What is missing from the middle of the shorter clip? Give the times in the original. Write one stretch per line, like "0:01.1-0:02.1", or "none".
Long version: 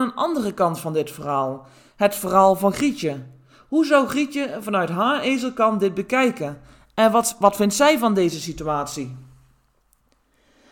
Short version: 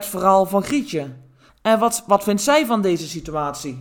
0:03.6-0:06.8